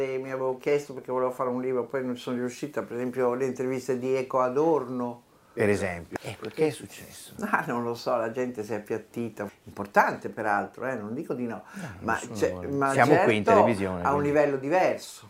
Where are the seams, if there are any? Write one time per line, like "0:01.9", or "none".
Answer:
0:06.2
0:09.5